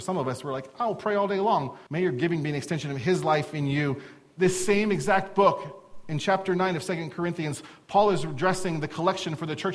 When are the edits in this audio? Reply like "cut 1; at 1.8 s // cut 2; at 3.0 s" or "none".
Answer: cut 1; at 1.9 s